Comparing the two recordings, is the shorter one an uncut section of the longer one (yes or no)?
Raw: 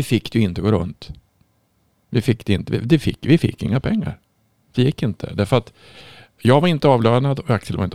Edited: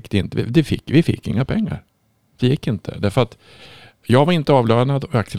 yes